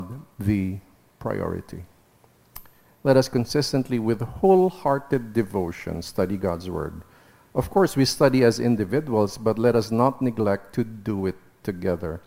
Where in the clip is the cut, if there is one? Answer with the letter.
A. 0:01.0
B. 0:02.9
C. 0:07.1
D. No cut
B